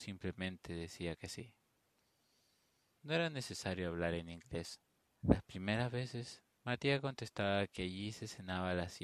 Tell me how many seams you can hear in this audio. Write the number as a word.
two